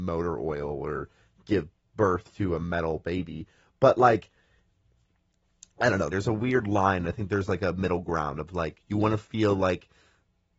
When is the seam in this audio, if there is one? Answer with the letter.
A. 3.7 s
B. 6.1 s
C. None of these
B